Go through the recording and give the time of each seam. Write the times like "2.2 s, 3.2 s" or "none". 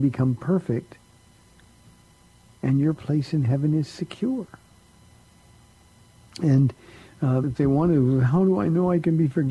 2.5 s, 6.3 s, 7.4 s